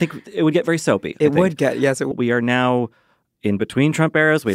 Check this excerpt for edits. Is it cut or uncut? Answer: cut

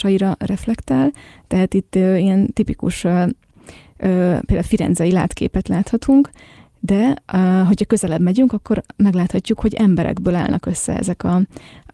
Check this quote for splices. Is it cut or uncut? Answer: uncut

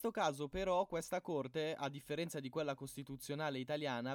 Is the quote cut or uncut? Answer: uncut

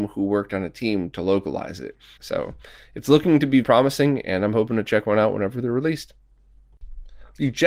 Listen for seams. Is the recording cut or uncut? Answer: cut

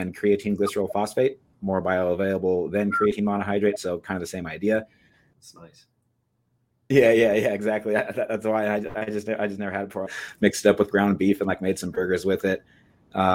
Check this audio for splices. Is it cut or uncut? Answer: cut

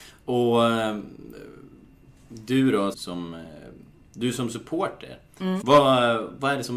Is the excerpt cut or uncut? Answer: cut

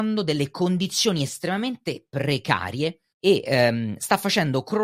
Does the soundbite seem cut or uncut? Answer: cut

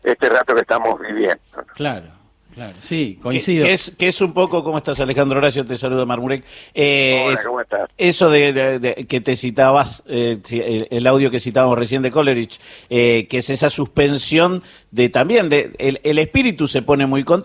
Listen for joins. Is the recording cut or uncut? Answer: uncut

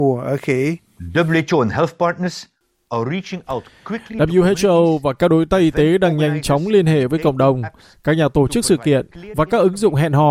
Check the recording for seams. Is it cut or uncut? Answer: uncut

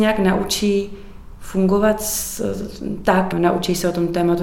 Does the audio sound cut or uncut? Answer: cut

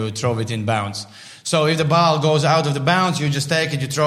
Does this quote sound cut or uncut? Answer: uncut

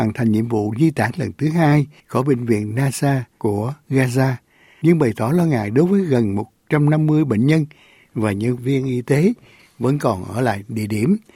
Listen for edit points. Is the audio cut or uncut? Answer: cut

